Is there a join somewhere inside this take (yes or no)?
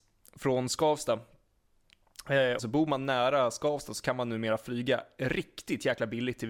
yes